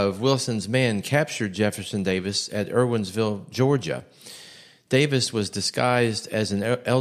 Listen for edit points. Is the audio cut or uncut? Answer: uncut